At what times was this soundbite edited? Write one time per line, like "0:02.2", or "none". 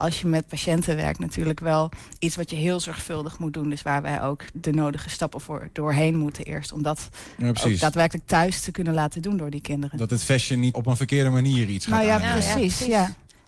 0:04.5
0:10.7